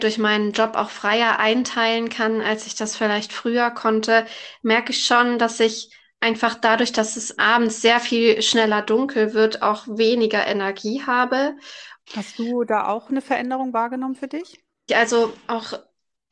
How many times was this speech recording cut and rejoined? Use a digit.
3